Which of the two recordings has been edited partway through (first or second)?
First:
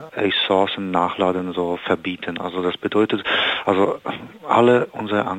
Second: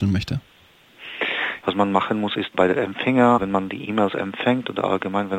second